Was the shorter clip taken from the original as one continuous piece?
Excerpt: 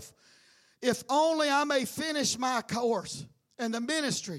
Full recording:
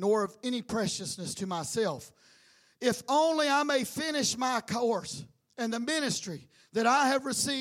yes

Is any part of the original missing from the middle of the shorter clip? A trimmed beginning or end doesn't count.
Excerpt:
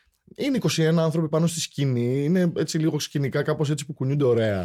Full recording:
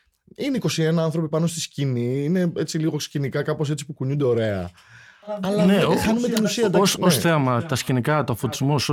no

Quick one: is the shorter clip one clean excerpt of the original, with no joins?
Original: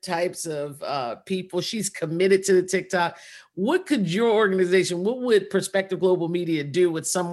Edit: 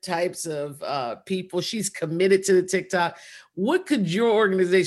yes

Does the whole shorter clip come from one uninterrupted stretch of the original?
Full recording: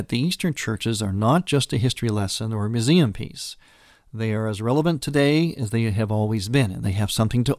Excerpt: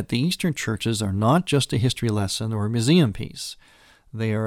yes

